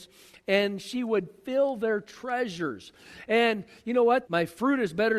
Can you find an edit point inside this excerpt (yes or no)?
yes